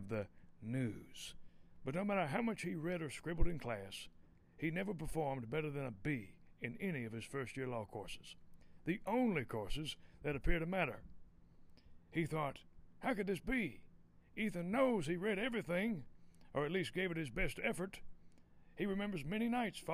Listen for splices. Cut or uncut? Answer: uncut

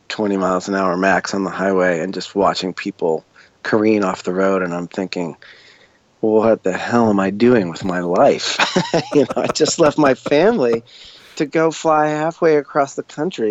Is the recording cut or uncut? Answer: uncut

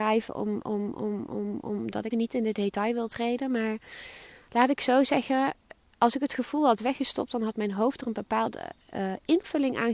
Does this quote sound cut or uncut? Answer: cut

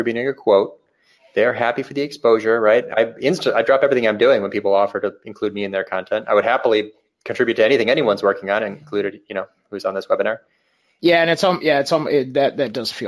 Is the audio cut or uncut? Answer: cut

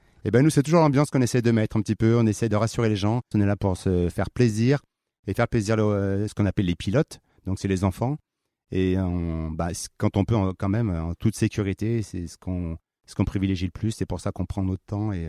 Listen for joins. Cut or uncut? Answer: cut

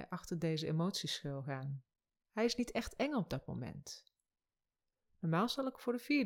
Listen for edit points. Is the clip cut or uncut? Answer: cut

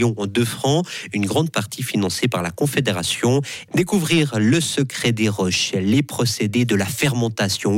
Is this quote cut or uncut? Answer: cut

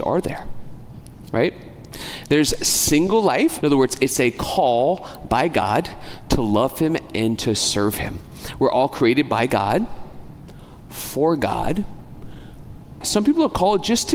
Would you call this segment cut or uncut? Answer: cut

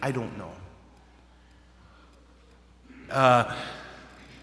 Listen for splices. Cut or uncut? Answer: cut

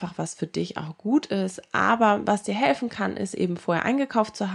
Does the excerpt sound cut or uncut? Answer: uncut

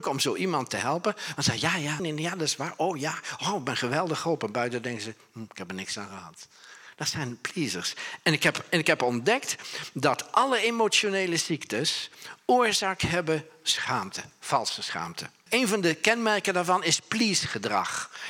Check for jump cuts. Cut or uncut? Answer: cut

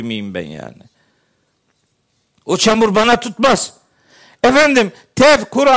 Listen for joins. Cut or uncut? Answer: uncut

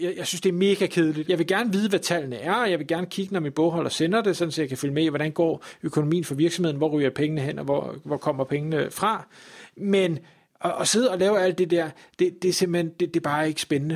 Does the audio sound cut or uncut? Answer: cut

